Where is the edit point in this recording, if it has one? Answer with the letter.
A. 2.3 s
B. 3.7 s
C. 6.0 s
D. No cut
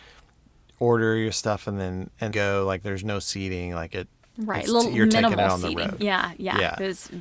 A